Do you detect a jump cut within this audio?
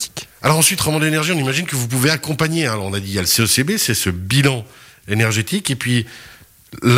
no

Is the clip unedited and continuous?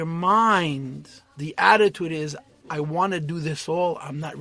yes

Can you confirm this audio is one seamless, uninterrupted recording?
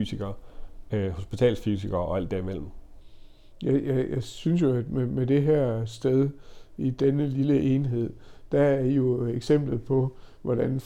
yes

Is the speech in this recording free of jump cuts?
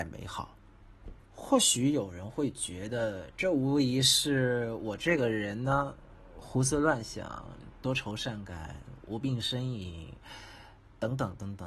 no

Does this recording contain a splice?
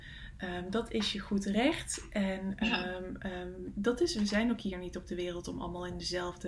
no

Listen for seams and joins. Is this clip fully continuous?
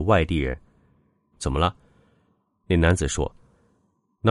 no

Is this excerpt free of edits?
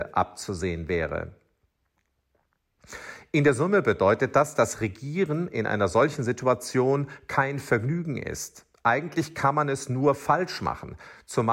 yes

